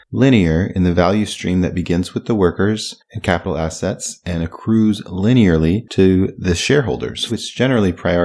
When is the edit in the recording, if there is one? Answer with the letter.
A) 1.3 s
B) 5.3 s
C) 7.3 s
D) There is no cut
C